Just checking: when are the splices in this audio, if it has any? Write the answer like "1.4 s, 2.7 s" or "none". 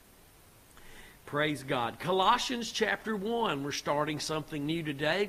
none

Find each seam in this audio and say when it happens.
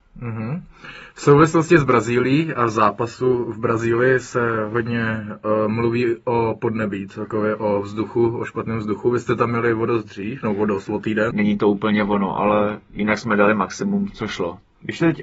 11.3 s, 14.1 s

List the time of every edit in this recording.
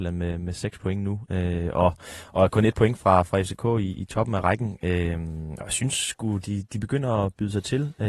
none

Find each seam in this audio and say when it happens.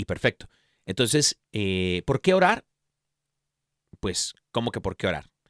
none

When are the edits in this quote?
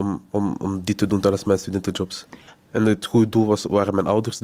2.5 s

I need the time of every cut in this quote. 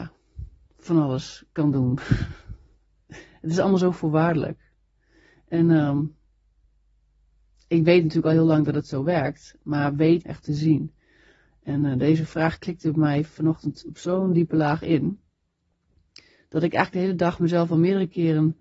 10.2 s

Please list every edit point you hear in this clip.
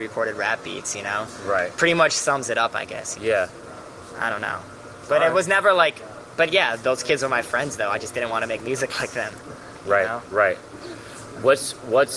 3.1 s

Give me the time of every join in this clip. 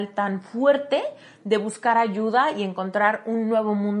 none

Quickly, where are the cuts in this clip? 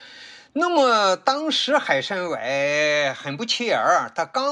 none

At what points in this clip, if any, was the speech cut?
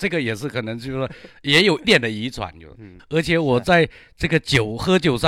1.8 s, 3.0 s

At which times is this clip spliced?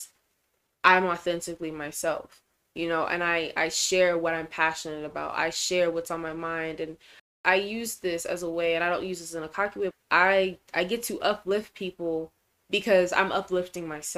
9.9 s

